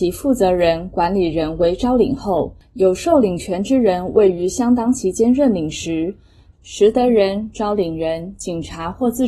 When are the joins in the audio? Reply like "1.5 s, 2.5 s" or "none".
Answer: 6.5 s